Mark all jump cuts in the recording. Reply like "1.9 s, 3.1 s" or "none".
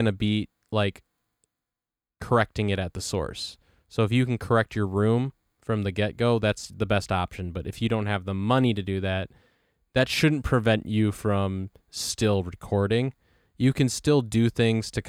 none